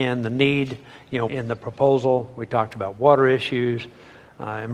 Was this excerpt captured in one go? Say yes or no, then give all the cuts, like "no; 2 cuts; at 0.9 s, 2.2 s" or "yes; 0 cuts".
no; 1 cut; at 1.3 s